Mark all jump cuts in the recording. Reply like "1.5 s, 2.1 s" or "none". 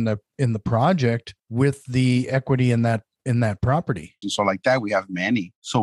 1.4 s, 4.2 s